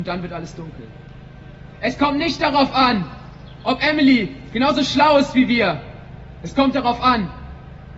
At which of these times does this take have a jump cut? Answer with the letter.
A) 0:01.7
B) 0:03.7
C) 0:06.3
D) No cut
A